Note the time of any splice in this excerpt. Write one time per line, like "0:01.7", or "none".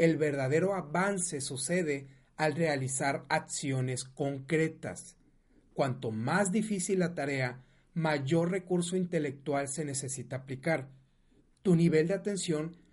none